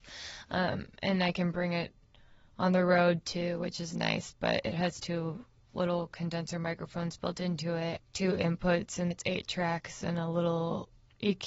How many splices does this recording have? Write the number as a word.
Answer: two